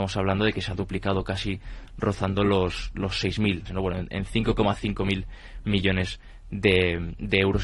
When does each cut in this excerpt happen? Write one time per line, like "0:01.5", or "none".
0:03.7